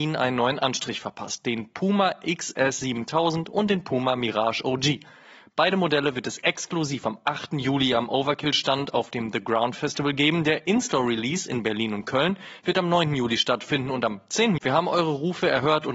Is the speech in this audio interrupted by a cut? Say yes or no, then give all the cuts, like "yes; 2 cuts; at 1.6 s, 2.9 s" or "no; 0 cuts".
yes; 1 cut; at 14.6 s